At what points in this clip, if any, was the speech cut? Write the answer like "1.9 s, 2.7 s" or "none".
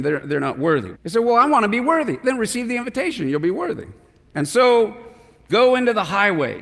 0.9 s, 5.5 s